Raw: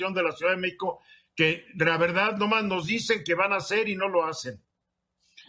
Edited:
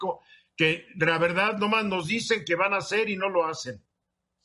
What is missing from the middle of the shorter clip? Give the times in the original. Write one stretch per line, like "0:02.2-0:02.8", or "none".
none